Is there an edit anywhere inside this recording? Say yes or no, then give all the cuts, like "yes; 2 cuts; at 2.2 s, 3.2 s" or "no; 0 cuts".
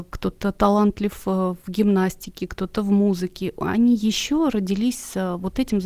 no; 0 cuts